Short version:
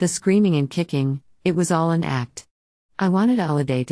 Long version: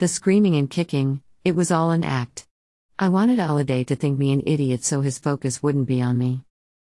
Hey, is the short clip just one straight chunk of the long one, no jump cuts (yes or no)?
yes